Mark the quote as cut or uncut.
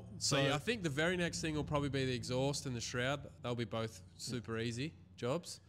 uncut